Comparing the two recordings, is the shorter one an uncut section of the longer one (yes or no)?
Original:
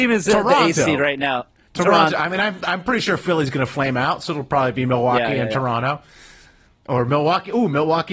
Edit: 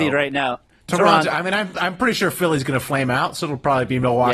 yes